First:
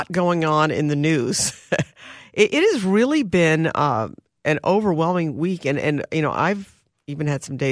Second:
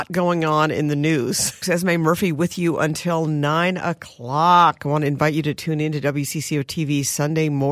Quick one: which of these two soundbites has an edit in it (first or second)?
second